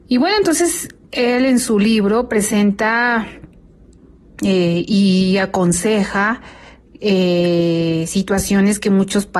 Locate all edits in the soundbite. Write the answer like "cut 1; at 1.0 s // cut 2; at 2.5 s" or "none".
none